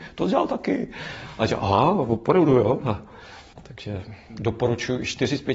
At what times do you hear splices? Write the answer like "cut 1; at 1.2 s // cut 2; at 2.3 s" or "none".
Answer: cut 1; at 3.5 s